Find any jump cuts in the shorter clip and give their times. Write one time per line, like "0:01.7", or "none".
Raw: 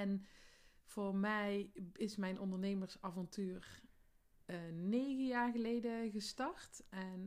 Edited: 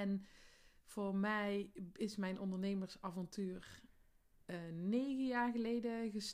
none